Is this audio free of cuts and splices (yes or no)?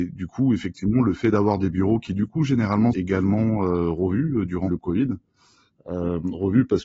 no